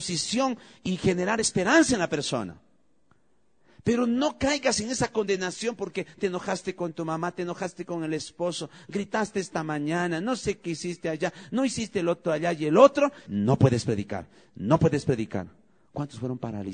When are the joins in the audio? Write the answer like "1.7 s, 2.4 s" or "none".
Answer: 13.3 s